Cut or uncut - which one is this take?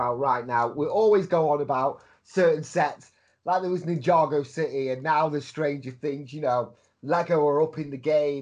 uncut